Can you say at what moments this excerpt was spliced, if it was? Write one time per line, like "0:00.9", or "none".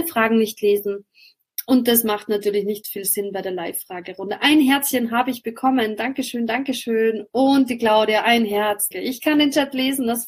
0:08.9

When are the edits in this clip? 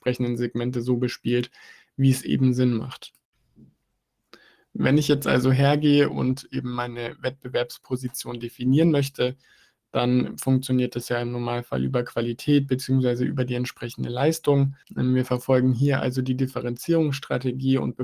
0:14.8

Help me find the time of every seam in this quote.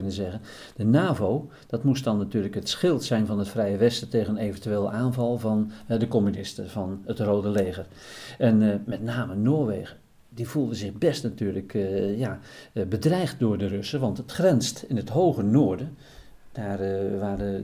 none

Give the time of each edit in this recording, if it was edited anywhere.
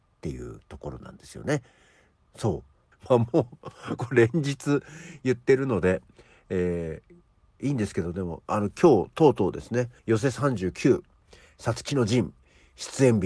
0:02.9
0:04.0
0:10.0

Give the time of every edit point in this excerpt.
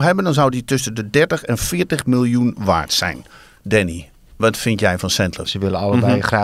0:05.5

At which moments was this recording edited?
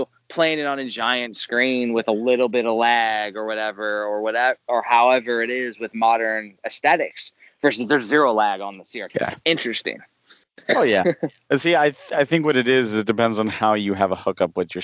0:09.1

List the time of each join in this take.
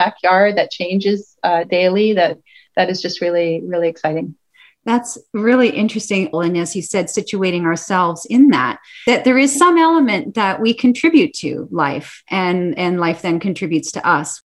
0:06.3

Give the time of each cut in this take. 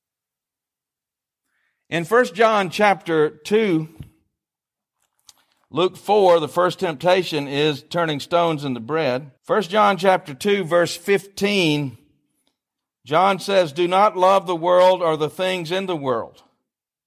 0:09.4

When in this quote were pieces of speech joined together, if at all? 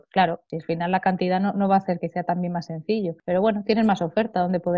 0:02.0

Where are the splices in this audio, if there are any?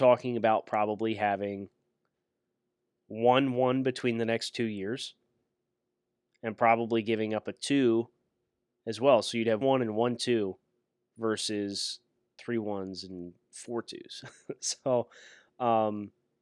0:09.6

